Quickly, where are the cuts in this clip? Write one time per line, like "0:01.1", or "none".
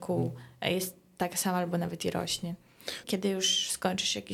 0:03.0